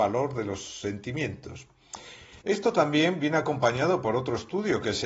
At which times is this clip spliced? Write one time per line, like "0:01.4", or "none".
0:02.4